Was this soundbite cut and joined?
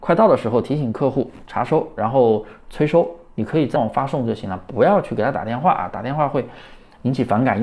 yes; 1 cut; at 3.7 s

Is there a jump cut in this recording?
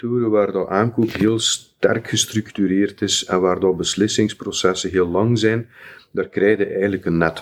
no; 0 cuts

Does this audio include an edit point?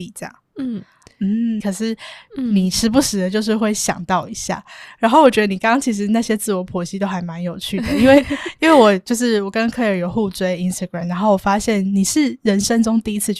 yes; 1 cut; at 1.6 s

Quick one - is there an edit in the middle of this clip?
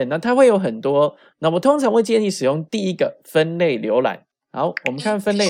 yes; 1 cut; at 4.3 s

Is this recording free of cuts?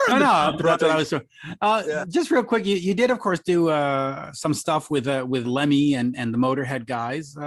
no; 1 cut; at 5.4 s

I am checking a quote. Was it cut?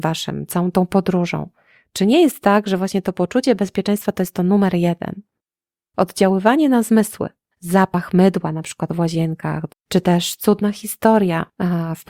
yes; 2 cuts; at 7.5 s, 9.7 s

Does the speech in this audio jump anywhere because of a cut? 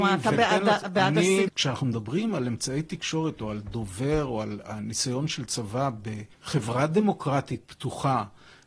yes; 2 cuts; at 1.5 s, 6.3 s

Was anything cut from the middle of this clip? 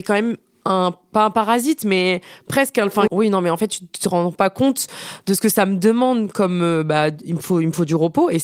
yes; 1 cut; at 3.1 s

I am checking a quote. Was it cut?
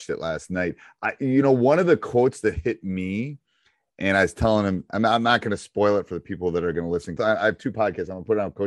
yes; 1 cut; at 7.2 s

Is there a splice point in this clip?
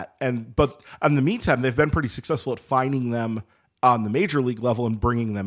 no; 0 cuts

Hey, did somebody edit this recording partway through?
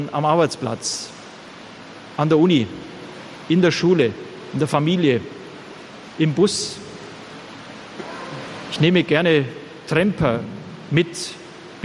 yes; 1 cut; at 6.1 s

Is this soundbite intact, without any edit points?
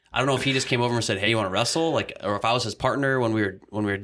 yes; 0 cuts

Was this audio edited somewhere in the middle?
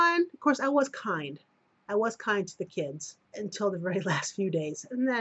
yes; 2 cuts; at 1.9 s, 3.2 s

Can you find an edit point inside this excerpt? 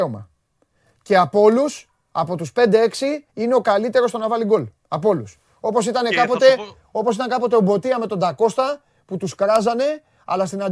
yes; 2 cuts; at 3.3 s, 4.8 s

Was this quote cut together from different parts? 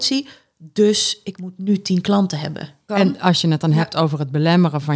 yes; 1 cut; at 2.9 s

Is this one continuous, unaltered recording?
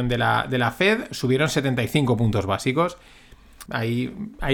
no; 1 cut; at 3.7 s

